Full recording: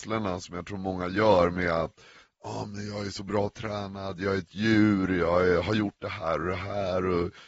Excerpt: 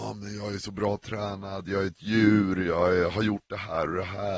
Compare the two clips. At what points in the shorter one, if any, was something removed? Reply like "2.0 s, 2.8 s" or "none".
none